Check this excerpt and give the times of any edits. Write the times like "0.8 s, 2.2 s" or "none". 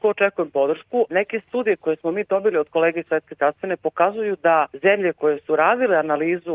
1.1 s, 4.7 s